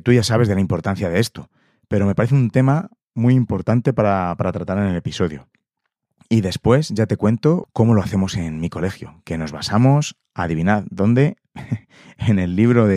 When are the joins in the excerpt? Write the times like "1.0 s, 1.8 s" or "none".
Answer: 7.6 s